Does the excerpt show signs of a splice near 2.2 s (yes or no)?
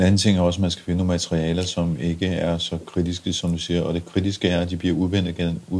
no